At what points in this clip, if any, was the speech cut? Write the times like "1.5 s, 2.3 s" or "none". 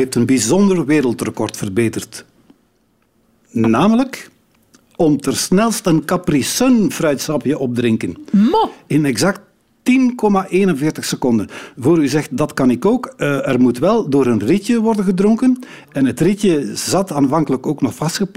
none